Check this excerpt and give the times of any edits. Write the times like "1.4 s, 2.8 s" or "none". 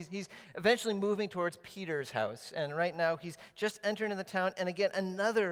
none